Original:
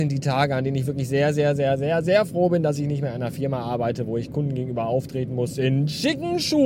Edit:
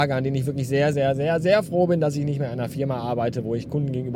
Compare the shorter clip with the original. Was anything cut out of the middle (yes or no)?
yes